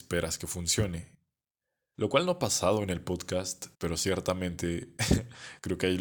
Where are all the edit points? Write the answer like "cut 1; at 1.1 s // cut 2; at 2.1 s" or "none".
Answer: cut 1; at 1.9 s // cut 2; at 3.7 s